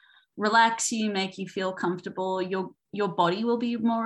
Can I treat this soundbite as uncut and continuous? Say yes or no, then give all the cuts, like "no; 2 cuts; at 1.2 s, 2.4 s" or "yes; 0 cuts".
yes; 0 cuts